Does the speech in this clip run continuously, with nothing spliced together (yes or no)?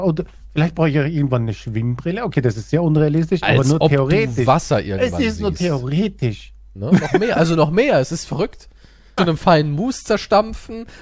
no